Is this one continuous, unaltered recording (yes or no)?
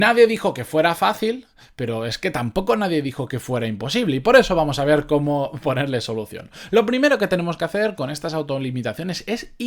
yes